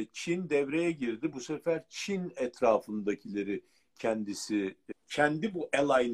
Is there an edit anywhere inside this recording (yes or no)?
yes